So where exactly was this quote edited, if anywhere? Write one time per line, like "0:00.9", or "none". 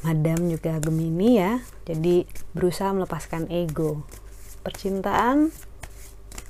none